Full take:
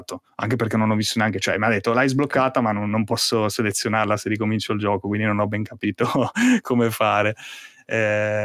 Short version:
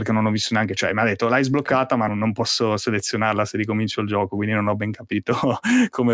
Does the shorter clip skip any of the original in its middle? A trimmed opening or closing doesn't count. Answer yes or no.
yes